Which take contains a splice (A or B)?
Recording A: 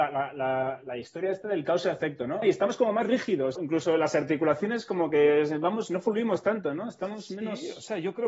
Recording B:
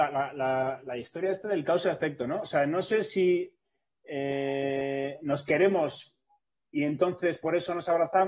A